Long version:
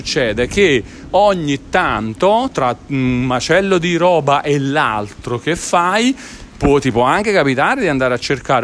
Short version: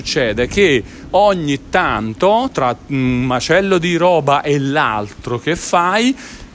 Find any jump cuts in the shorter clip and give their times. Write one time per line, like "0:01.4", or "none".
none